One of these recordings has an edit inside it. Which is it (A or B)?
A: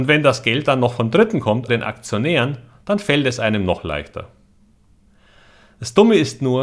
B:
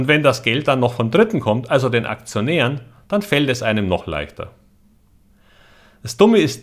A